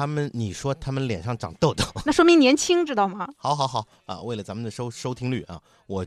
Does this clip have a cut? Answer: no; 0 cuts

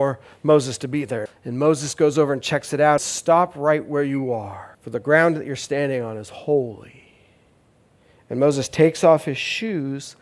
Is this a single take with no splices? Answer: no; 3 cuts; at 1.3 s, 3.0 s, 4.7 s

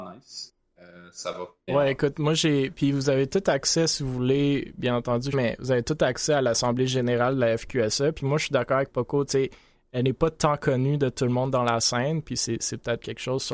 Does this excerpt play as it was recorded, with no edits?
no; 2 cuts; at 1.7 s, 5.3 s

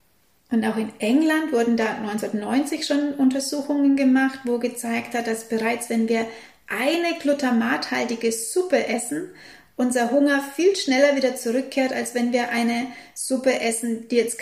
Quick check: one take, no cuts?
yes; 0 cuts

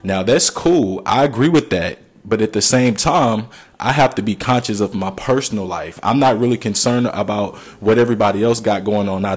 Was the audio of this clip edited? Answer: no; 0 cuts

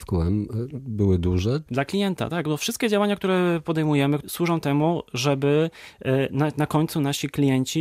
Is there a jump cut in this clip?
yes; 1 cut; at 1.7 s

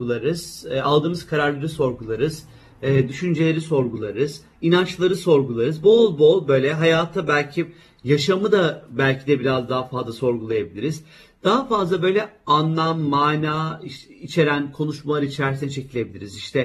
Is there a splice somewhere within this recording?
no; 0 cuts

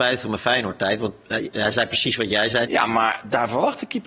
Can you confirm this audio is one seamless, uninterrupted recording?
no; 2 cuts; at 1.5 s, 2.7 s

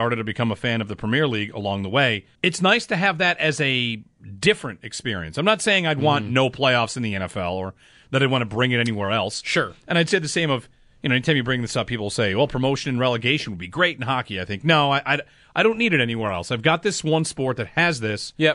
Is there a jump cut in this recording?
yes; 1 cut; at 2.4 s

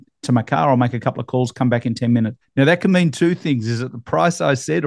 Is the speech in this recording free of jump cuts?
no; 1 cut; at 2.4 s

